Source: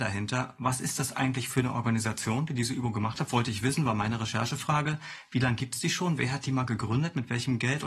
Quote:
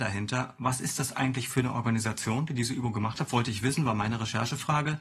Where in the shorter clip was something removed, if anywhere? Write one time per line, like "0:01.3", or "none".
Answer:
none

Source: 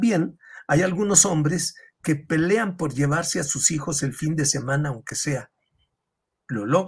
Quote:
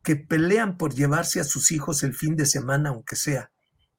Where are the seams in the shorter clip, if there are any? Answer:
none

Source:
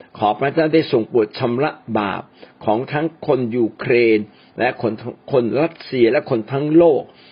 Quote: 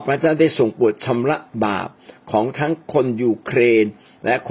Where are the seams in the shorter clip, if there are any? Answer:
none

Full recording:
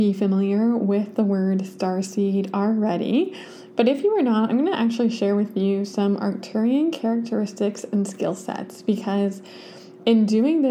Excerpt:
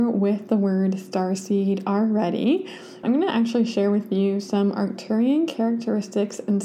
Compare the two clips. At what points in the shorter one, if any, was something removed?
0:03.0

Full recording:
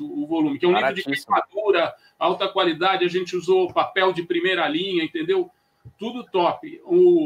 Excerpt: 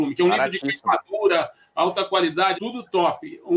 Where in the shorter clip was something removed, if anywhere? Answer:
0:02.5

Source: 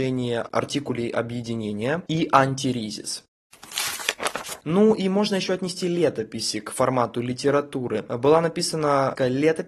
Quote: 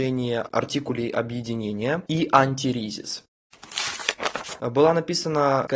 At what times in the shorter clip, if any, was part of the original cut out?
0:04.6

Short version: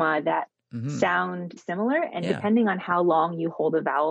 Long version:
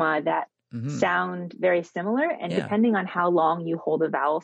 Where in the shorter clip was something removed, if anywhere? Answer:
0:01.6

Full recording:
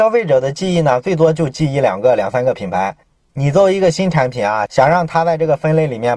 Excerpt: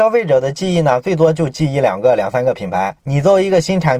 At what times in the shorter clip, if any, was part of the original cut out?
0:03.0

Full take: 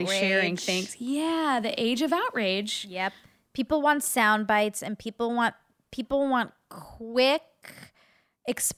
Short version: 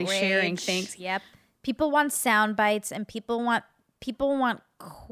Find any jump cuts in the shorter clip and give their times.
0:01.0

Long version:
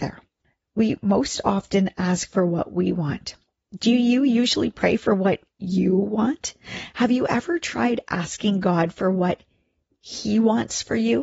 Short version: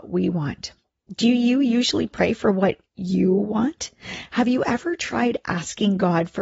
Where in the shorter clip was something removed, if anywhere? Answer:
none

